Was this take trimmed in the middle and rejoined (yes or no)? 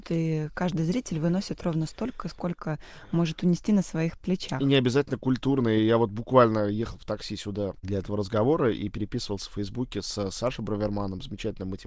no